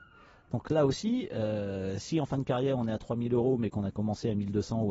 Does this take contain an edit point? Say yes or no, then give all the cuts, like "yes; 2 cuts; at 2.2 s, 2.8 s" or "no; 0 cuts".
no; 0 cuts